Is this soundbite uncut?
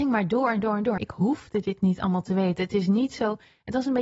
no; 1 cut; at 1.0 s

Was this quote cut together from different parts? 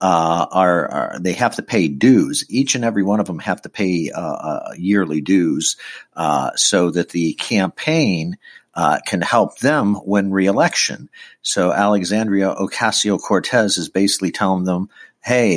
no; 0 cuts

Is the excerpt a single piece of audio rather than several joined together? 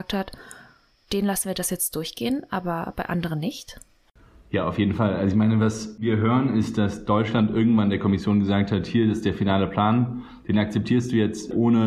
yes; 0 cuts

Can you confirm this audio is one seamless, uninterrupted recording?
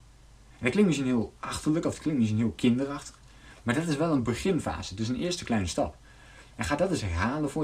yes; 0 cuts

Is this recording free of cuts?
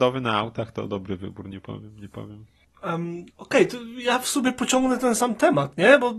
no; 1 cut; at 3.3 s

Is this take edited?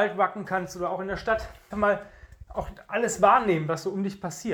yes; 1 cut; at 1.7 s

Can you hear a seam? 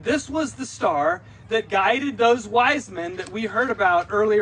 no; 0 cuts

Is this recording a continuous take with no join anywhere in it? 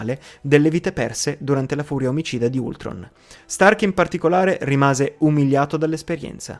yes; 0 cuts

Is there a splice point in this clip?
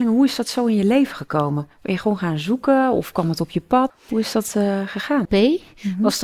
yes; 2 cuts; at 3.9 s, 5.3 s

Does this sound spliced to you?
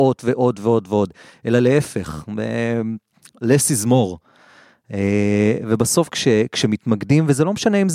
no; 0 cuts

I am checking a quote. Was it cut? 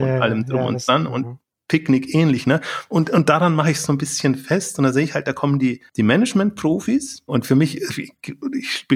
yes; 1 cut; at 7.3 s

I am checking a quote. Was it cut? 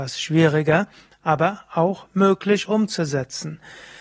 no; 0 cuts

